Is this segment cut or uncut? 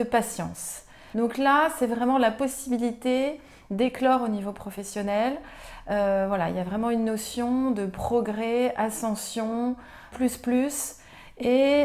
cut